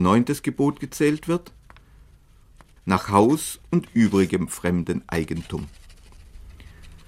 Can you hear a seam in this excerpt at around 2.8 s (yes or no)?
yes